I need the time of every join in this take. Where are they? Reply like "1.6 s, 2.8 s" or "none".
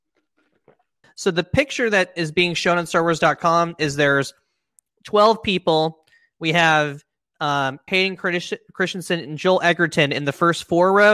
1.0 s, 7.9 s